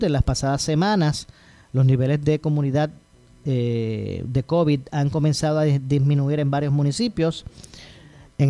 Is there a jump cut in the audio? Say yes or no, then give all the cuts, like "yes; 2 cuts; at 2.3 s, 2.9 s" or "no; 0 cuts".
no; 0 cuts